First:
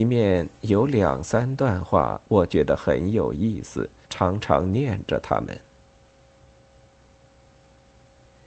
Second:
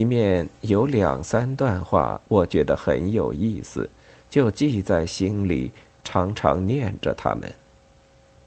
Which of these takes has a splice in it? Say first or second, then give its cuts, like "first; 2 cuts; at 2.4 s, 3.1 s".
first; 1 cut; at 4.0 s